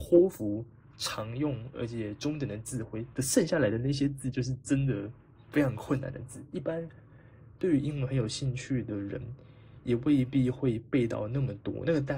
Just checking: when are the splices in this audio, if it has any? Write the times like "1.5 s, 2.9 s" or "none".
none

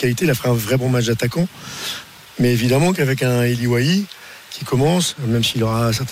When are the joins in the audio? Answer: none

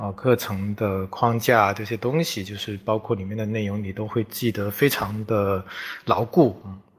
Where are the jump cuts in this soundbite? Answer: none

